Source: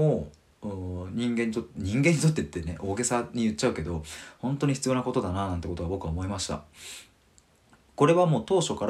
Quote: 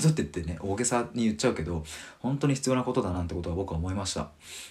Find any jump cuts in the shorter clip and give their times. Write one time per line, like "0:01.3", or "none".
0:03.1

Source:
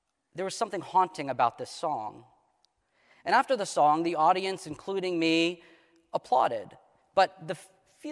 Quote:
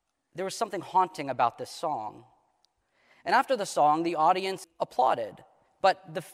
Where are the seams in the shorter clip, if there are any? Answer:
0:04.6

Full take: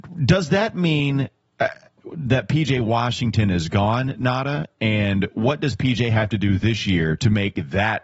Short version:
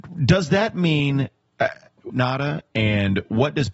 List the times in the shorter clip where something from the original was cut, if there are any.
0:02.1

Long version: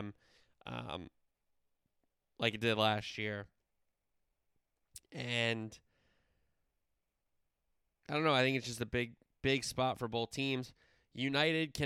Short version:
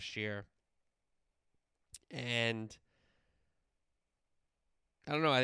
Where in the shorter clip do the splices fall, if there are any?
none

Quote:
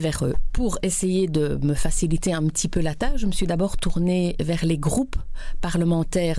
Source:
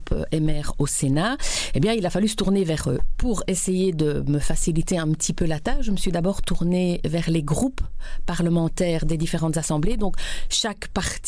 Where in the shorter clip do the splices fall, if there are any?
none

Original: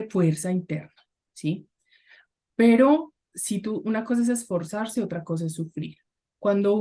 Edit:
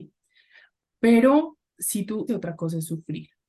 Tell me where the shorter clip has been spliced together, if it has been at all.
0:02.3

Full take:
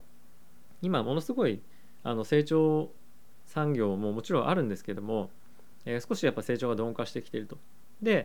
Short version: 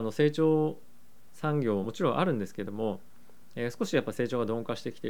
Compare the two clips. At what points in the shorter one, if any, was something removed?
0:01.8

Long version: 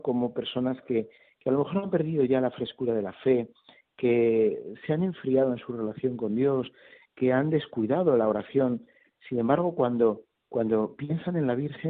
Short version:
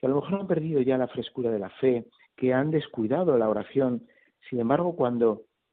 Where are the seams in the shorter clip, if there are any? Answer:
0:02.2

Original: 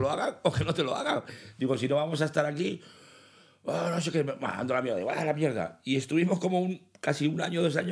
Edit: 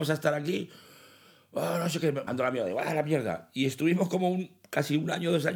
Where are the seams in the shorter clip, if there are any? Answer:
0:02.3

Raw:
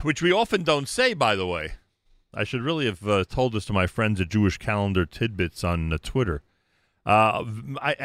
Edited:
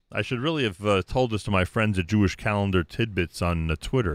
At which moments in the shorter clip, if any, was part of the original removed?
none

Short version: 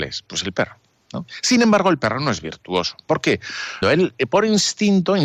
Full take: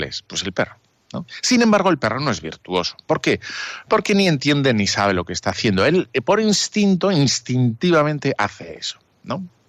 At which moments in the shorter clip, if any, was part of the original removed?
0:03.8

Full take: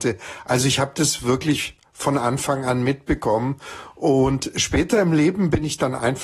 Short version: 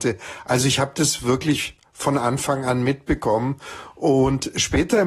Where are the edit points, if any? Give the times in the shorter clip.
none

